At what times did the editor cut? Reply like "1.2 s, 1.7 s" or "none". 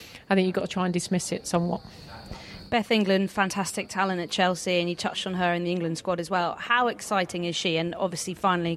none

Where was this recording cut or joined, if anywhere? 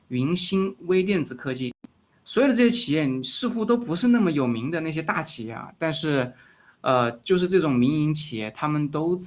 2.1 s

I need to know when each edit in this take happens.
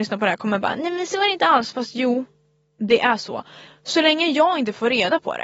3.7 s

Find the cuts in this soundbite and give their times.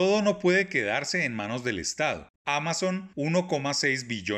2.4 s

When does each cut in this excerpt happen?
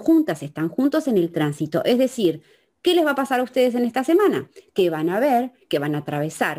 5.6 s

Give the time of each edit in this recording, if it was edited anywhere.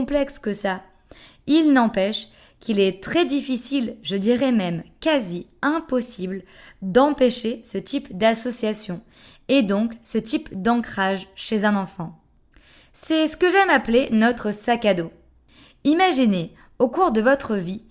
none

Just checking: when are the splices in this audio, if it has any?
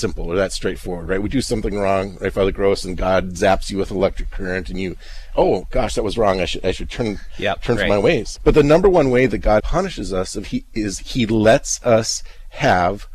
8.4 s, 9.6 s

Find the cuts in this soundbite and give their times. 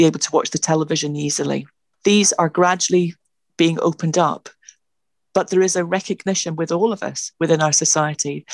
none

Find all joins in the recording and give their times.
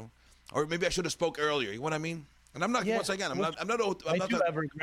3.5 s

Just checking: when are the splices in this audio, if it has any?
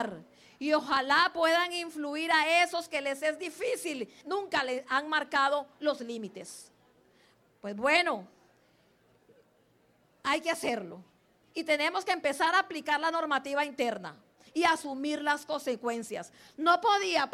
4.2 s, 14.5 s

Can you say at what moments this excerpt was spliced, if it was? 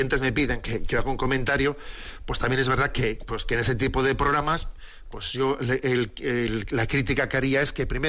none

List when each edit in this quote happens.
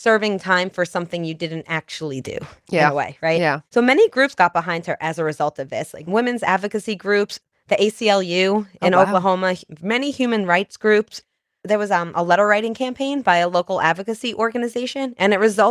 3.7 s

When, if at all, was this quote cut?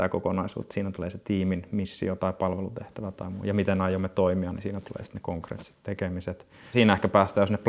6.7 s

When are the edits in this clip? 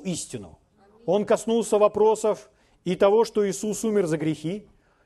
none

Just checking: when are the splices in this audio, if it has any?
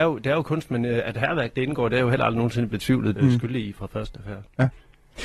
3.2 s

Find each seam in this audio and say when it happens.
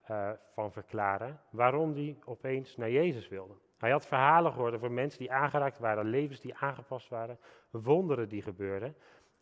none

